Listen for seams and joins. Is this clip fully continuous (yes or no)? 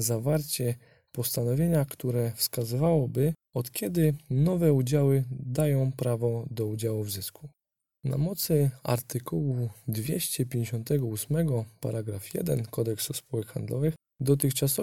yes